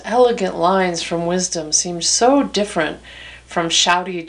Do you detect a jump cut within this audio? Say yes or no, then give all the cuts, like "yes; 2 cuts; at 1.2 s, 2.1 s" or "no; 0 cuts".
no; 0 cuts